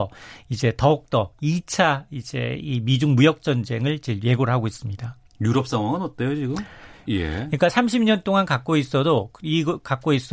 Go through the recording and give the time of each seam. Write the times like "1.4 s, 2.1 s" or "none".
7.1 s

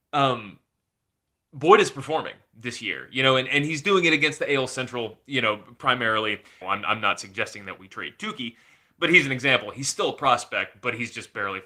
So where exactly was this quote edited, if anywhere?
6.6 s

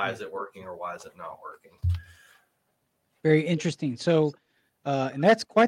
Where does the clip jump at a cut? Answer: none

